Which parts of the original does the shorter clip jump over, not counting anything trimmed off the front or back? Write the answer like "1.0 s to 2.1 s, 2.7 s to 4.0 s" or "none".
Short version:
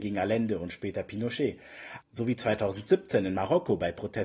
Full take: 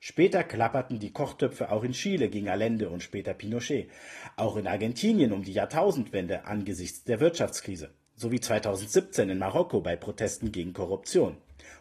4.3 s to 8.1 s